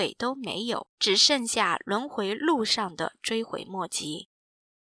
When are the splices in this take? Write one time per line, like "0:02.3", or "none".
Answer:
0:00.9

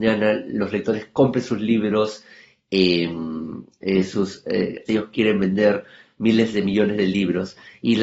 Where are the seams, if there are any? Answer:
0:04.9

